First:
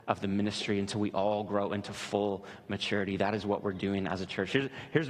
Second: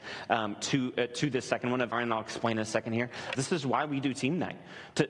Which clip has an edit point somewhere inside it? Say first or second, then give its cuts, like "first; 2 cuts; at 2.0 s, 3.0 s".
second; 2 cuts; at 1.9 s, 3.3 s